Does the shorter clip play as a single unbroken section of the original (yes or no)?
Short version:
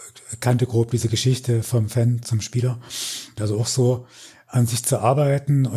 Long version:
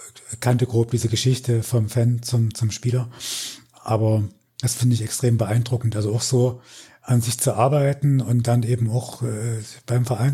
no